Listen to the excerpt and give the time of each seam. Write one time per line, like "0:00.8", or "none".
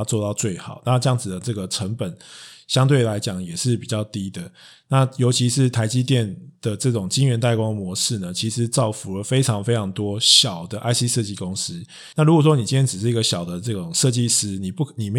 0:12.1